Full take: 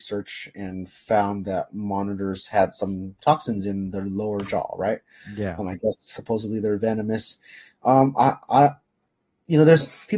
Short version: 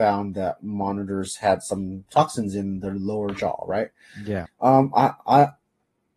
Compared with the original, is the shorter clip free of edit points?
no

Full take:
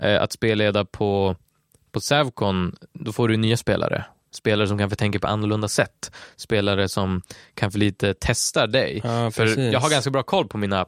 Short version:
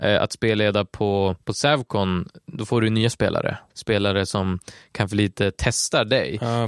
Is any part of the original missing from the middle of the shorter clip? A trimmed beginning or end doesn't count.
yes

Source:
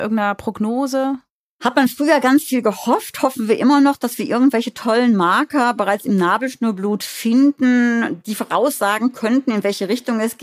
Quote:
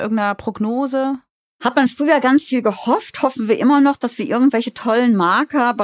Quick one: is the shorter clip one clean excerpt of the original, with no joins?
yes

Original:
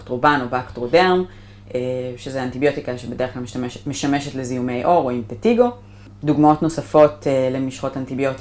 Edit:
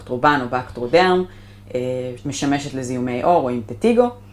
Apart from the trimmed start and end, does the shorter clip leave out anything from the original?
yes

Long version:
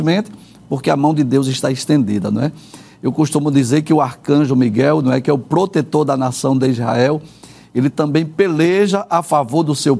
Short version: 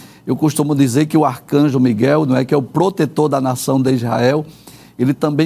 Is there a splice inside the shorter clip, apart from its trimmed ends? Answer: no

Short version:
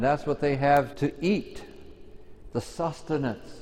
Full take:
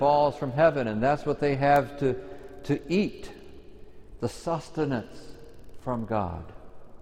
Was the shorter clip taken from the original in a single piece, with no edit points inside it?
no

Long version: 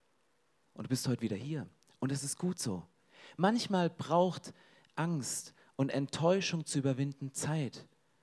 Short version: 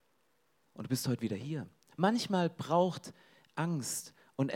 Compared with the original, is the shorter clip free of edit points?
no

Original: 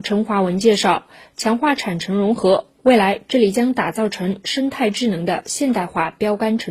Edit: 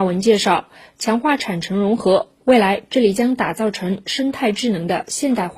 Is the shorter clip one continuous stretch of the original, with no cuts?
yes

